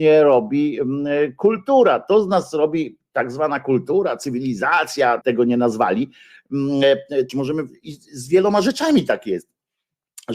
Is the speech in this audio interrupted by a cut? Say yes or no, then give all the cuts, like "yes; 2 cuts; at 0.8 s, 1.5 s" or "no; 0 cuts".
yes; 2 cuts; at 5.2 s, 7.3 s